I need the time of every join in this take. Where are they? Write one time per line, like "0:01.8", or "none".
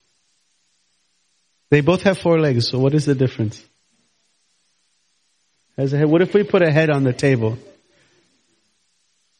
none